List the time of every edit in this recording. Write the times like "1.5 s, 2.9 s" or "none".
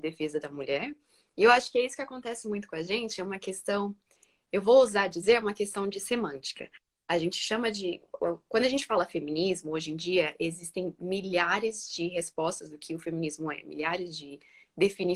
none